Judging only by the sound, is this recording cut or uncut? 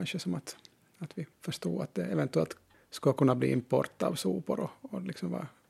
cut